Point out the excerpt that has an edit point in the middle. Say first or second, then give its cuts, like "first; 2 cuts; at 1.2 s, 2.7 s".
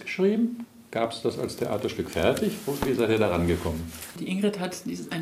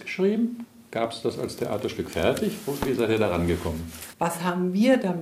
second; 1 cut; at 4.1 s